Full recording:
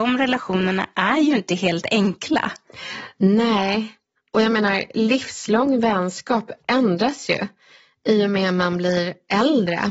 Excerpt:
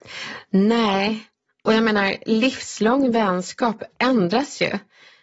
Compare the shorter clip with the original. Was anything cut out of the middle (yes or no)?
no